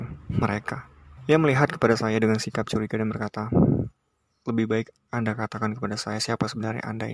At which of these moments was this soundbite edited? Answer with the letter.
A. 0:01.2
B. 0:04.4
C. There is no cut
A